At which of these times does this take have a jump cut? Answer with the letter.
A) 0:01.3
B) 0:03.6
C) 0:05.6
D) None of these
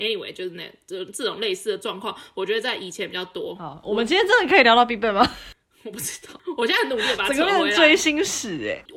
D